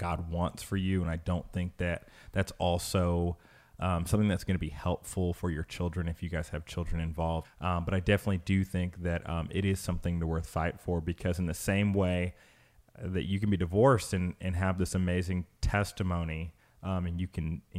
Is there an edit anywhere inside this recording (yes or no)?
yes